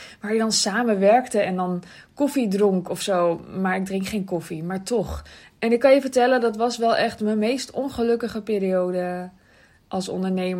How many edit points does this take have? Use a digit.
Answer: 1